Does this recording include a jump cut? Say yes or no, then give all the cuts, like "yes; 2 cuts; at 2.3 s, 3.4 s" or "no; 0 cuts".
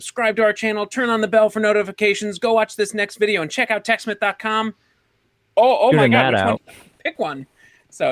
yes; 1 cut; at 6.6 s